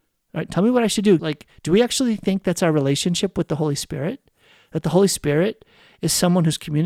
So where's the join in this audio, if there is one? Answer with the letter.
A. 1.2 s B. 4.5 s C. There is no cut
A